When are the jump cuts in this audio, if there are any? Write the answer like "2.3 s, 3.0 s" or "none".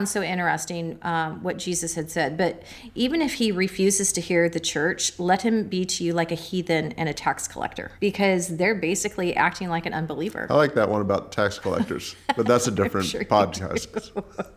8.0 s